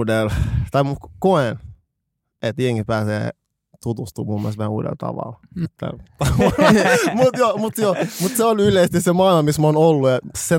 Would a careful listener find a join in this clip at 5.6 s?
yes; 1 cut; at 5.6 s

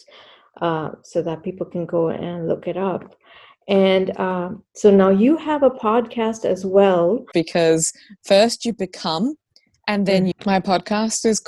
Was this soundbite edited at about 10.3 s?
yes; 2 cuts; at 7.3 s, 10.3 s

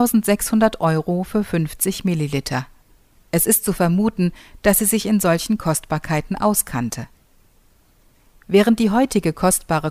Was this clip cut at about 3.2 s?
yes; 1 cut; at 3.2 s

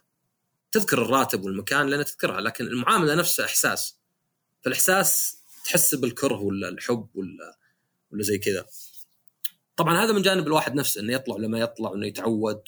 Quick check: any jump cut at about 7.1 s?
no; 0 cuts

